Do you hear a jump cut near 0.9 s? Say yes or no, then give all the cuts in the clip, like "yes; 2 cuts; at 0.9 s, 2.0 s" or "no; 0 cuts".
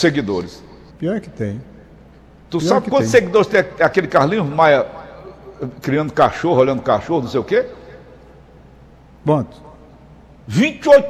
yes; 1 cut; at 0.9 s